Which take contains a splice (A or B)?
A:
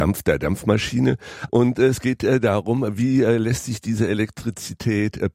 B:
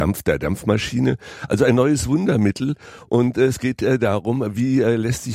A